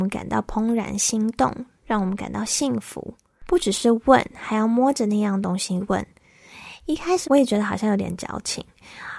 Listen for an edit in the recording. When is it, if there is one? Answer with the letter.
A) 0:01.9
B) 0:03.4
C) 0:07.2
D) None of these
C